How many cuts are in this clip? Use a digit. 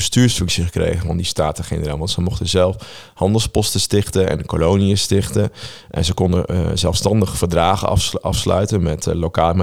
0